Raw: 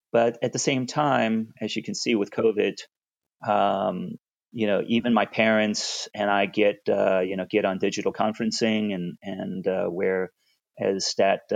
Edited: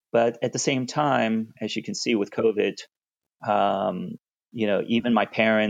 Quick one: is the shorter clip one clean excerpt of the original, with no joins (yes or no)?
yes